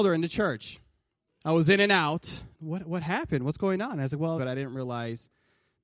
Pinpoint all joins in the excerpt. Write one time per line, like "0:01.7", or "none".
0:01.3
0:02.5
0:04.4